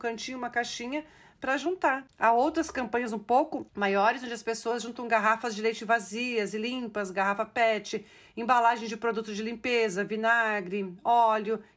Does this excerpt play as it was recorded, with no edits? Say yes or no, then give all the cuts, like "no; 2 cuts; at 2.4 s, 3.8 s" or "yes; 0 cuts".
yes; 0 cuts